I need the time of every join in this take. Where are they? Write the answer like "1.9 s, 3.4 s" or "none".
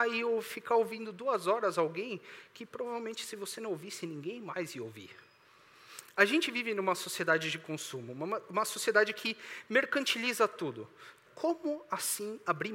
6.0 s, 11.3 s